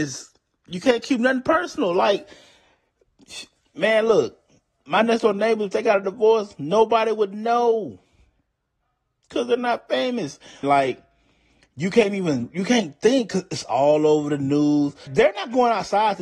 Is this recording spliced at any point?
yes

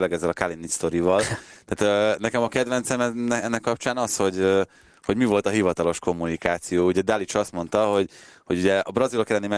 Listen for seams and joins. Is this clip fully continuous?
yes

